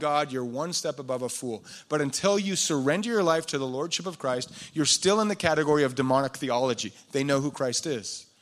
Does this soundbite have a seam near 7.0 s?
no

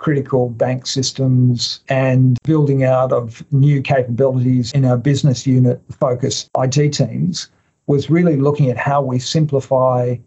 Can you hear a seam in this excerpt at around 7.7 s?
no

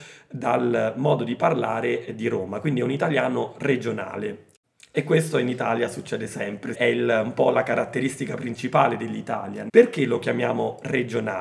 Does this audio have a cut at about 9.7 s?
yes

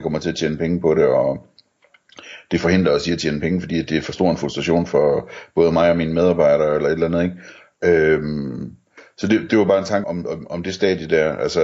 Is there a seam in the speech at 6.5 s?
no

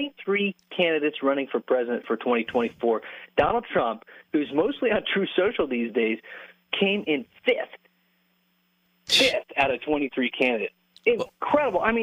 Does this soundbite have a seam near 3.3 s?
no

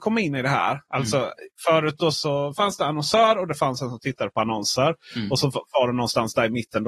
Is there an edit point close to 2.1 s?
yes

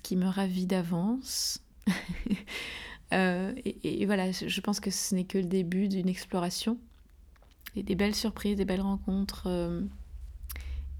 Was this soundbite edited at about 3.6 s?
no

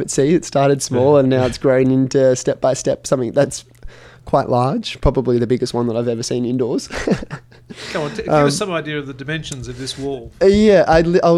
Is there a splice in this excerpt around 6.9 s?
no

